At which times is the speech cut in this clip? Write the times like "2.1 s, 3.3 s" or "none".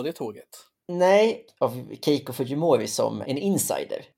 1.5 s, 3.2 s